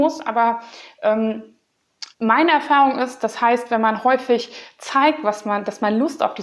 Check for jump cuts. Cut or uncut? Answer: cut